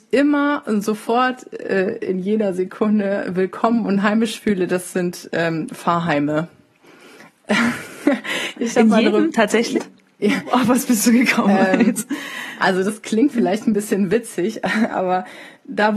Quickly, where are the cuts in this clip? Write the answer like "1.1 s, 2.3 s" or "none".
9.7 s